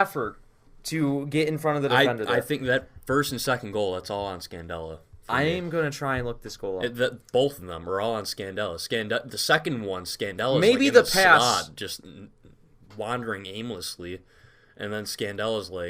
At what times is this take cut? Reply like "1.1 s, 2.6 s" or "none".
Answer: none